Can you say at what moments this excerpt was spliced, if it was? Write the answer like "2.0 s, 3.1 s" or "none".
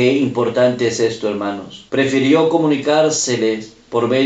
1.9 s